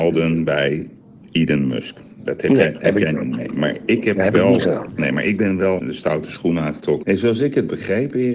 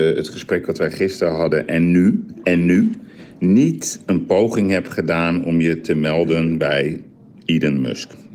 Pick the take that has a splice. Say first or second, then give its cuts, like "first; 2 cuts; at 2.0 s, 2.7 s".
first; 2 cuts; at 5.8 s, 7.0 s